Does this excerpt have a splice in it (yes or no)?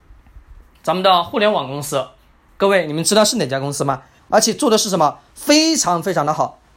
yes